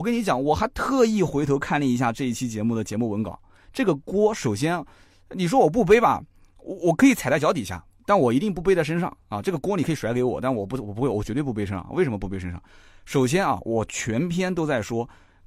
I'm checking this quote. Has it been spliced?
no; 0 cuts

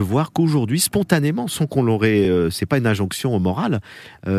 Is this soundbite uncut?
yes; 0 cuts

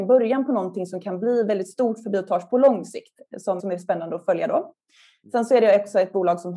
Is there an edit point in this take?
yes; 1 cut; at 3.6 s

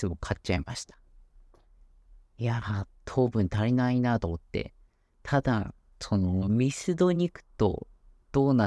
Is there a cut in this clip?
no; 0 cuts

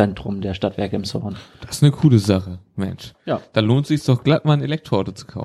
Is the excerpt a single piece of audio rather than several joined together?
yes; 0 cuts

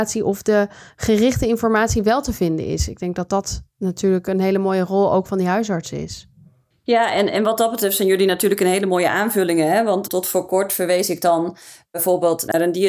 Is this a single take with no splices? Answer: yes; 0 cuts

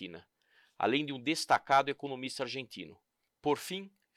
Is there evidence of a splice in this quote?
yes; 1 cut; at 3.3 s

